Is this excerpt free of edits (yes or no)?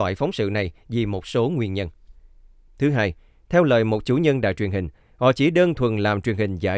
no